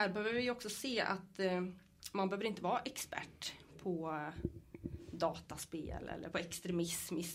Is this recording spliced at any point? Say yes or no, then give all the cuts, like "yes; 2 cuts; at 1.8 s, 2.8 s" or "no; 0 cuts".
yes; 1 cut; at 6.3 s